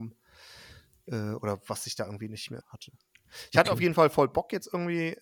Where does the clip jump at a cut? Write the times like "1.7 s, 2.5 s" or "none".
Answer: 2.6 s